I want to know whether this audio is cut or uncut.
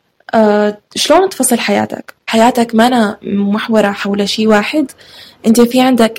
cut